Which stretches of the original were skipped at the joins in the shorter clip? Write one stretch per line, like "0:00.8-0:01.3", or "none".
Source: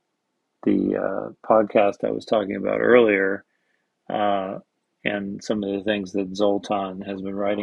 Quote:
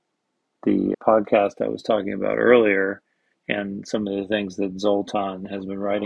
0:00.9-0:01.4
0:03.8-0:04.9